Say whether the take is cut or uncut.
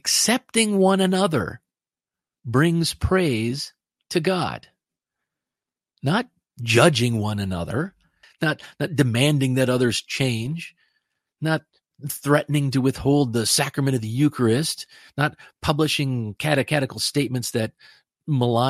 cut